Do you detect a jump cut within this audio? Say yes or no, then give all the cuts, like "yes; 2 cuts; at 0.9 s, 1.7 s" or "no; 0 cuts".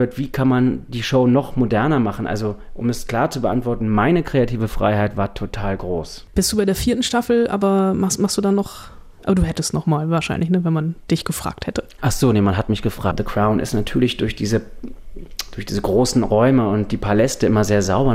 yes; 1 cut; at 13.1 s